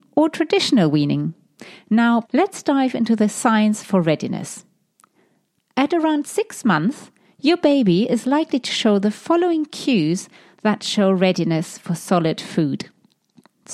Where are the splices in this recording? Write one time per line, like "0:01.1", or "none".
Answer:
0:02.2